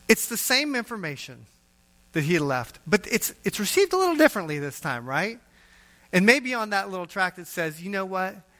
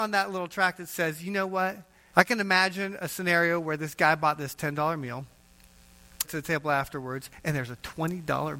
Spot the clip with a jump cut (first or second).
second